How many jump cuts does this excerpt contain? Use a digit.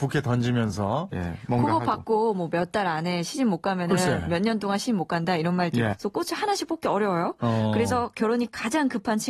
2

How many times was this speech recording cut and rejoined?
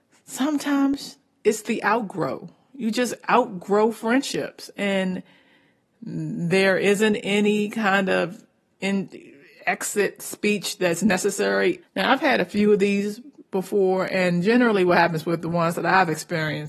1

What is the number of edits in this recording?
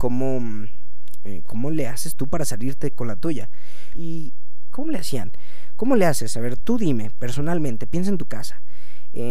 2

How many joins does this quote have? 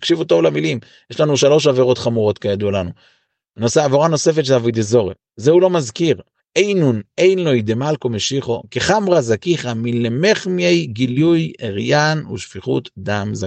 1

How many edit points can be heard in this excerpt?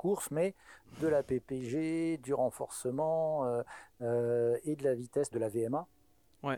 1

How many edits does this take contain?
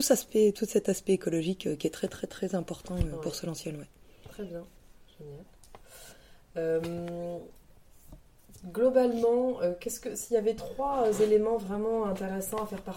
0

